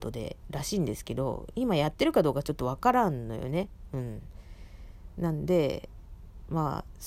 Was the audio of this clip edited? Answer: no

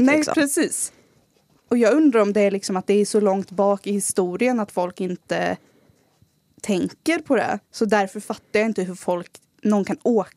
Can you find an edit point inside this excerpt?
yes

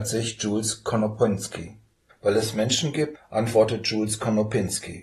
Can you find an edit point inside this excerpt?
yes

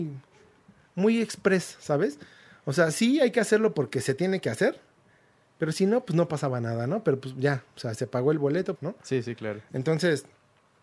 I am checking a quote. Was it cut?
yes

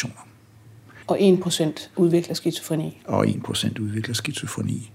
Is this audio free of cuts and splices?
no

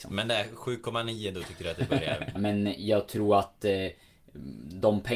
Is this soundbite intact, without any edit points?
no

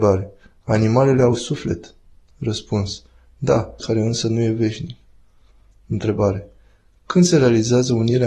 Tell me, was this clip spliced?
yes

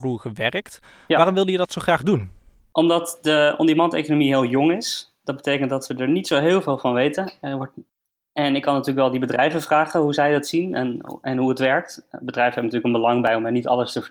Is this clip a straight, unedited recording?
yes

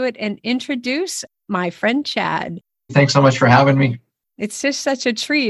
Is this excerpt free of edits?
no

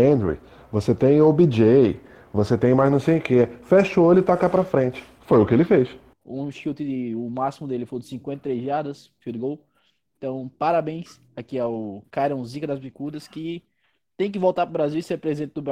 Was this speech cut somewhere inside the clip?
yes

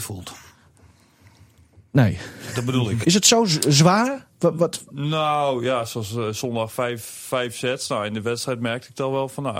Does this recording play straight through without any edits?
no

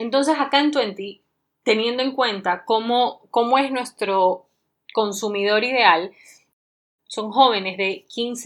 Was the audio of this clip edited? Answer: no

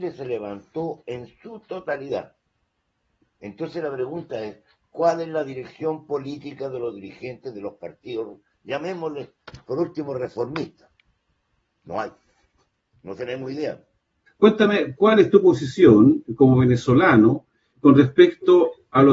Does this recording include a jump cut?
yes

